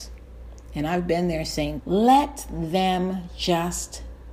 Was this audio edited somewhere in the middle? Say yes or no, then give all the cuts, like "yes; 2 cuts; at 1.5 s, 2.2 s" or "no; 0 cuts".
yes; 1 cut; at 1.8 s